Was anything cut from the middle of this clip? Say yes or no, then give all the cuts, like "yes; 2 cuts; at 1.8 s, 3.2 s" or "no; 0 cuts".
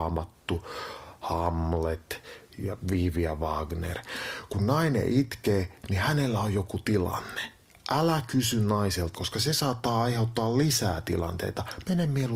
yes; 1 cut; at 9.1 s